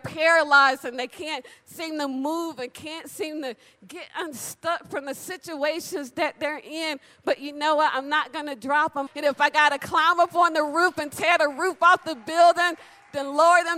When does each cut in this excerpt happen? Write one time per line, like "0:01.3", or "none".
0:09.1